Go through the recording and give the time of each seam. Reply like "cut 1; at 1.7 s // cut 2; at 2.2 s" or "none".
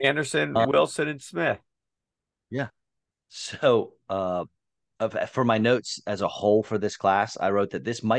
none